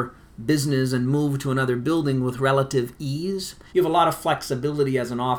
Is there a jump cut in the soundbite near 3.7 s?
yes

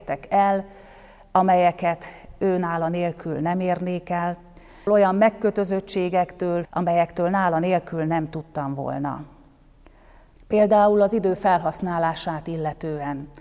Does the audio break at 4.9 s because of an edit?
yes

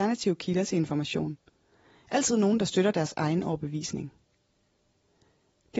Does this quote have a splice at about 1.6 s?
no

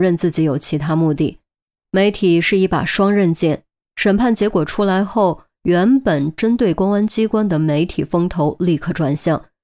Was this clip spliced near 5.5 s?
no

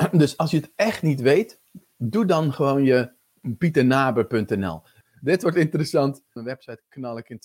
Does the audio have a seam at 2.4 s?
no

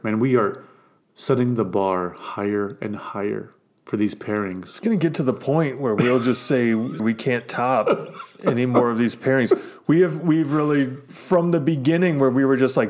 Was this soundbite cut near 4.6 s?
no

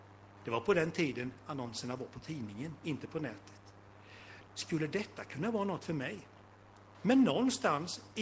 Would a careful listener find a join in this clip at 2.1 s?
no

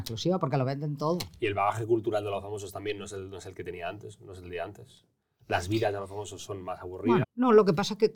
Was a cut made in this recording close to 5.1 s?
no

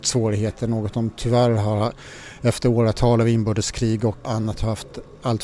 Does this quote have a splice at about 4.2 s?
yes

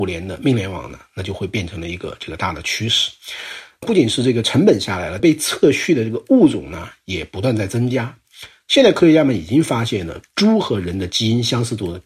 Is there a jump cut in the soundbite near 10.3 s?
no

